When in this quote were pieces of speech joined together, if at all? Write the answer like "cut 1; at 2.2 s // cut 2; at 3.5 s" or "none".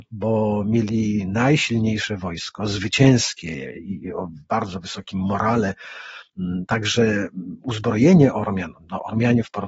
none